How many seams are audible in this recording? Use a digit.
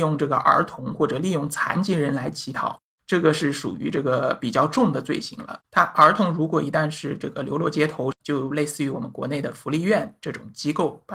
2